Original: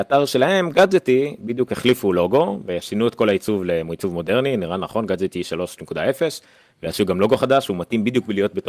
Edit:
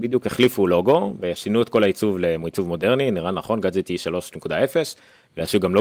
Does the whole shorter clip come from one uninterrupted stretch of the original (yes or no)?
yes